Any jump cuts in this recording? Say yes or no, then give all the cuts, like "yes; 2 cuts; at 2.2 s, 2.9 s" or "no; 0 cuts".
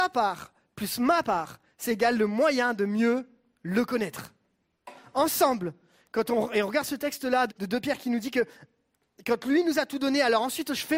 yes; 1 cut; at 7.5 s